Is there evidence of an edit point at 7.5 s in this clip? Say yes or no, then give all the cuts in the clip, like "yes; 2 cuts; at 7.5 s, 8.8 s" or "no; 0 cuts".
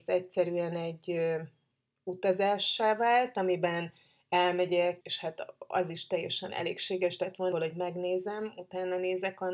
yes; 2 cuts; at 5.0 s, 7.5 s